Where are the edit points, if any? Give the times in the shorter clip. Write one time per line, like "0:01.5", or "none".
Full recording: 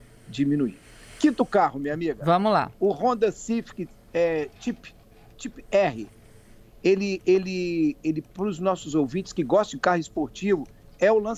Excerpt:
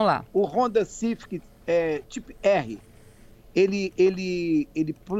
0:02.0